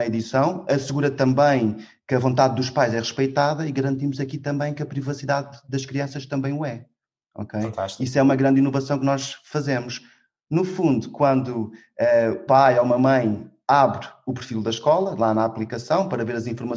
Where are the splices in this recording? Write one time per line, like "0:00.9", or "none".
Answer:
0:12.5